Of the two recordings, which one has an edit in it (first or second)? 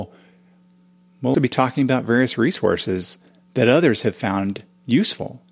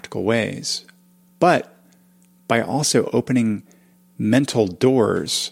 first